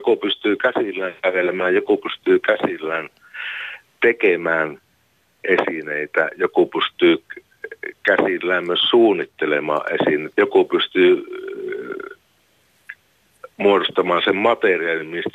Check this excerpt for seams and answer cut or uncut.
cut